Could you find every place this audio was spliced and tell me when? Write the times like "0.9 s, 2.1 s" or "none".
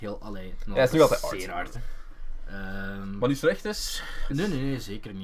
1.7 s, 4.3 s